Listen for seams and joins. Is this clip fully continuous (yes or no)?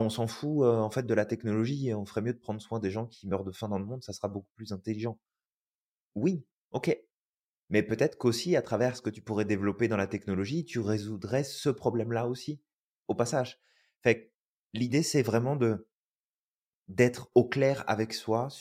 yes